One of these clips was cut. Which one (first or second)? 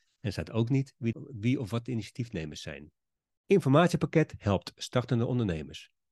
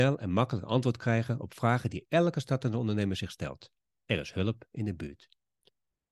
first